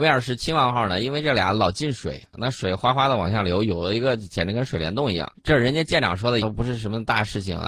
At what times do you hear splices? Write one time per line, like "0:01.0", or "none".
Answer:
0:05.3
0:06.4